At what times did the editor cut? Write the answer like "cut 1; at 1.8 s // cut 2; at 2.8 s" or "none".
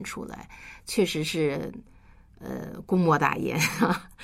none